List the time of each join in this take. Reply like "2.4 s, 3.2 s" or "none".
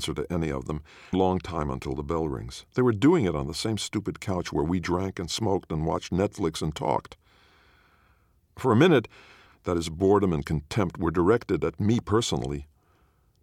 1.1 s, 2.7 s, 9.5 s